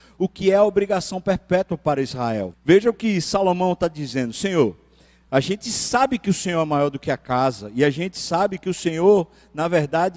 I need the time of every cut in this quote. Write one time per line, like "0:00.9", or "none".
0:02.5